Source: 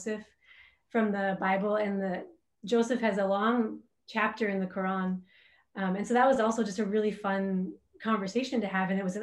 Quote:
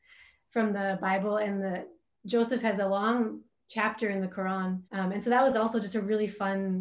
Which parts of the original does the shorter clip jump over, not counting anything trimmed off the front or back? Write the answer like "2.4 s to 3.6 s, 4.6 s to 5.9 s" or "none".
5.3 s to 5.7 s